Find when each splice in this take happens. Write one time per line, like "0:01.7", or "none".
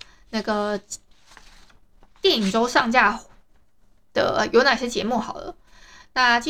none